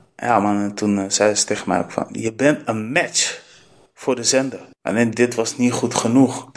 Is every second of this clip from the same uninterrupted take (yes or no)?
no